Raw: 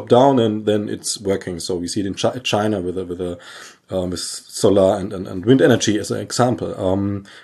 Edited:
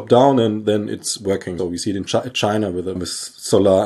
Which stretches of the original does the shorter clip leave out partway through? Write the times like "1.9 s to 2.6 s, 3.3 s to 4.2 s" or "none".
1.6 s to 1.7 s, 3.1 s to 4.1 s